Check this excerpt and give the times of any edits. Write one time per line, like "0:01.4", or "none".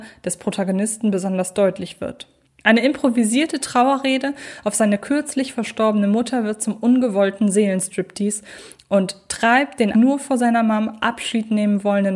0:02.4
0:09.9